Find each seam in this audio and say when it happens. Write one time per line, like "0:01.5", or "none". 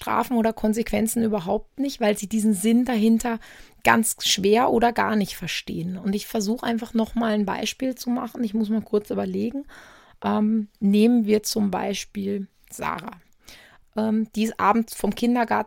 0:13.8